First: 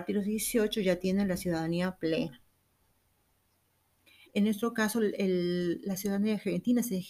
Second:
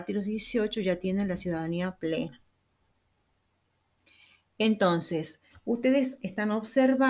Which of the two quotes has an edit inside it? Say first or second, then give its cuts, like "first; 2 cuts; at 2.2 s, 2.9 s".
first; 1 cut; at 4.3 s